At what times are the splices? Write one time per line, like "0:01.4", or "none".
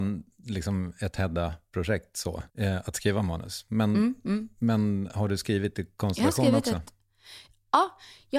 0:02.5